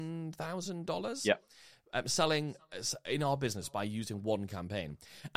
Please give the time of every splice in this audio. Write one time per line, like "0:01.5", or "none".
none